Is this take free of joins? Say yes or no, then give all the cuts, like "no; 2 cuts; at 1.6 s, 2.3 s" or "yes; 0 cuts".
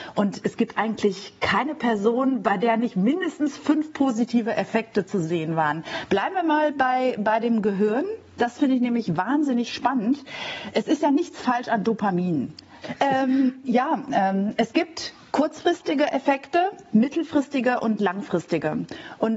no; 1 cut; at 12.8 s